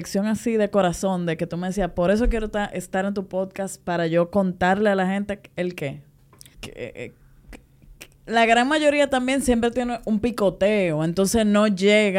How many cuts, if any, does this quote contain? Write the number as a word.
one